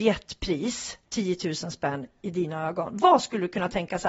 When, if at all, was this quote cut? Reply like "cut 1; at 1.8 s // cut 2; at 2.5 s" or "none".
cut 1; at 1.0 s